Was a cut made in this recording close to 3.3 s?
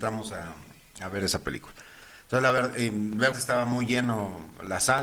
yes; 1 cut; at 3.3 s

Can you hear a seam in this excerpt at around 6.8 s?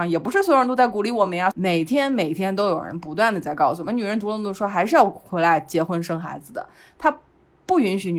no; 1 cut; at 1.5 s

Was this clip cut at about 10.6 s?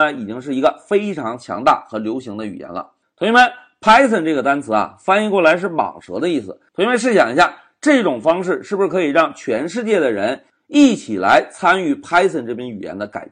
no; 2 cuts; at 3.0 s, 6.7 s

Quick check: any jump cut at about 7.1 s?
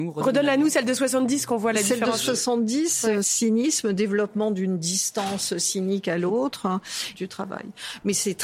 yes; 2 cuts; at 3.2 s, 7.1 s

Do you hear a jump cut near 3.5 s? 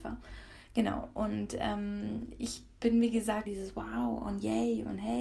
yes; 1 cut; at 3.5 s

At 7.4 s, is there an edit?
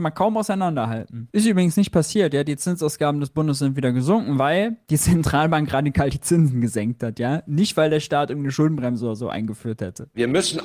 no; 1 cut; at 1.3 s

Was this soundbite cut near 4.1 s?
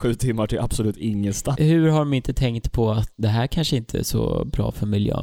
no; 1 cut; at 1.5 s

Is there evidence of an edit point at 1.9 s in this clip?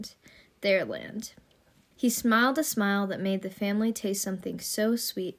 yes; 1 cut; at 1.9 s

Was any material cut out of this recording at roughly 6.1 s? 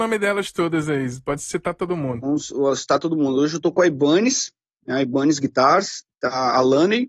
no; 0 cuts

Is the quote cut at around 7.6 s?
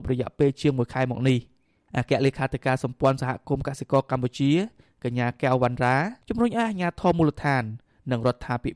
no; 0 cuts

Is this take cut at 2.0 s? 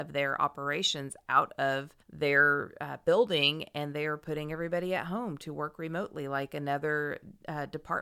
yes; 1 cut; at 2.0 s

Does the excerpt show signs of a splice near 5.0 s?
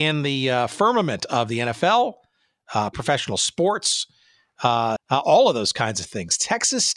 yes; 2 cuts; at 2.9 s, 5.0 s

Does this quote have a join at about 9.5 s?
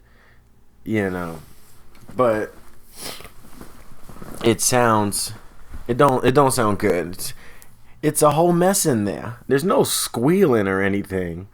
yes; 1 cut; at 9.5 s

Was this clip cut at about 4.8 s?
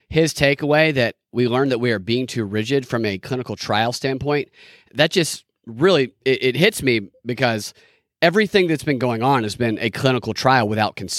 no; 0 cuts

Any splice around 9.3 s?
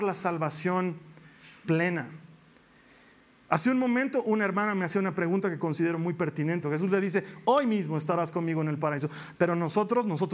yes; 2 cuts; at 6.6 s, 9.3 s

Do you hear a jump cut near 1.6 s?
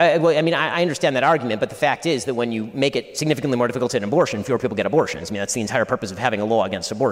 no; 0 cuts

